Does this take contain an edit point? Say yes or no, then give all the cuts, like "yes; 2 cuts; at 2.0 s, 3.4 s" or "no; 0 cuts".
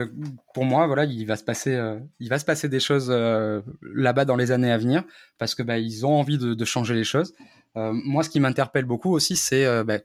no; 0 cuts